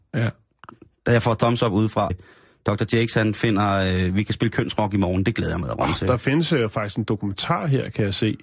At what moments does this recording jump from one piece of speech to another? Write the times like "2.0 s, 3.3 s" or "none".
2.1 s